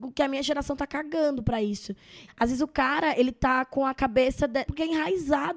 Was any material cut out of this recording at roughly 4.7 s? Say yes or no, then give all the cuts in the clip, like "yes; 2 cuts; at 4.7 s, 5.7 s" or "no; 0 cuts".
yes; 2 cuts; at 2.3 s, 4.7 s